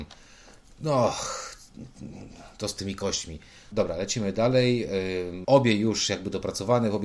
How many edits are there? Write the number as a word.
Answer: two